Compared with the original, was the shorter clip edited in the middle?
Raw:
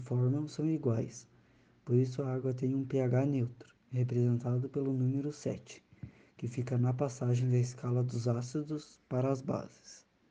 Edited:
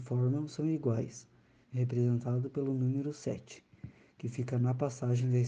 yes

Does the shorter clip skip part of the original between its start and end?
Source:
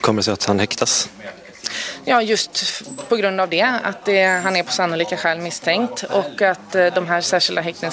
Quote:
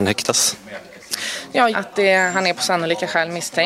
yes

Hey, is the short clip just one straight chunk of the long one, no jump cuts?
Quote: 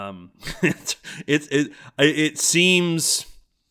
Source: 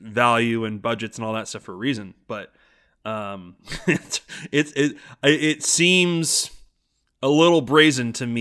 yes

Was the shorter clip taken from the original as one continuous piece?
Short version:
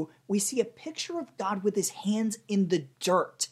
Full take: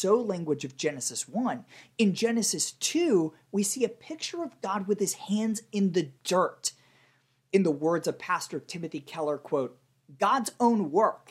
yes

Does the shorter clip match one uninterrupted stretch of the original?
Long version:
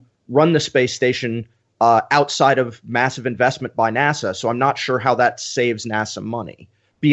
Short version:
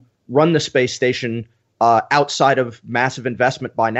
yes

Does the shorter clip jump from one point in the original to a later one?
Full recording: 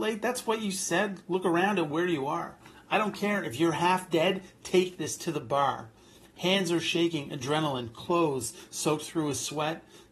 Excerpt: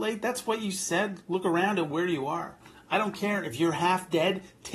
no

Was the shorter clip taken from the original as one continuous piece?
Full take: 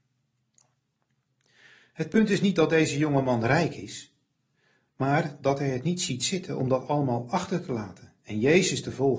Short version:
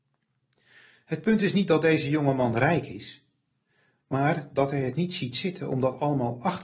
yes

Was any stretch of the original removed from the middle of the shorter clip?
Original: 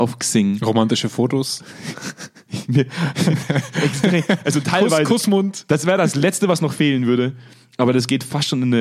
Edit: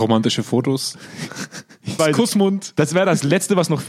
yes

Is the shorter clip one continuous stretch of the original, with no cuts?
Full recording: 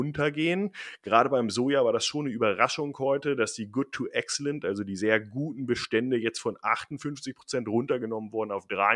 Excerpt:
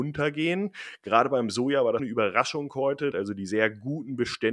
no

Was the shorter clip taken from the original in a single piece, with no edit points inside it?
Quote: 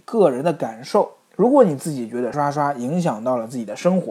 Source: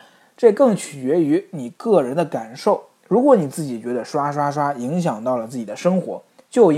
no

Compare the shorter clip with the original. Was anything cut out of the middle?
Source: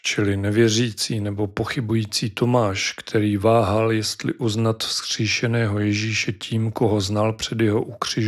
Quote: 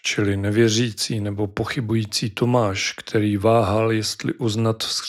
no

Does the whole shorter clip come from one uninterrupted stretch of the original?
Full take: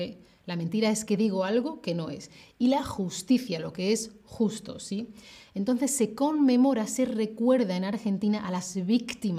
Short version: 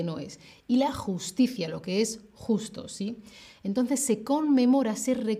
yes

